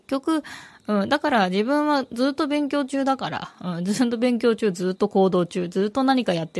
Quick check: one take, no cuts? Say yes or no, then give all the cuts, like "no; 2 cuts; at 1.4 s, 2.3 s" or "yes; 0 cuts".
yes; 0 cuts